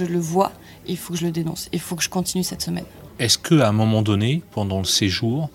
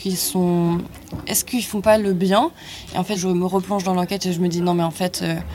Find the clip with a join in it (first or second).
second